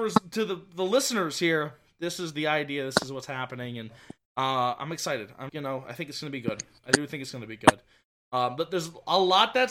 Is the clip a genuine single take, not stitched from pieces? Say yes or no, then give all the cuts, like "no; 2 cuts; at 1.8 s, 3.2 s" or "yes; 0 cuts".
no; 1 cut; at 5.5 s